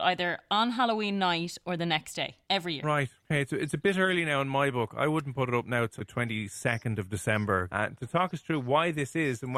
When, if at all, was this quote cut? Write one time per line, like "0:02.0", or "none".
0:06.0
0:07.7